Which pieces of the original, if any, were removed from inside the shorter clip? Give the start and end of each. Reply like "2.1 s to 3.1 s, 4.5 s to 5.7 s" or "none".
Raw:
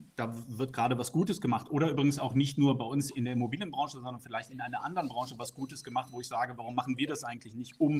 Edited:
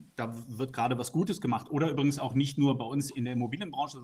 none